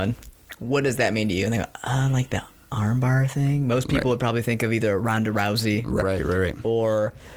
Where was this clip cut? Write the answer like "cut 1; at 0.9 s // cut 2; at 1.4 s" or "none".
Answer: cut 1; at 6.0 s